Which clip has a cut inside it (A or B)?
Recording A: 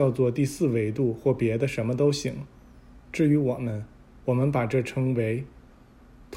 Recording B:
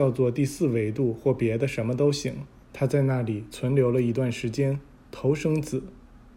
B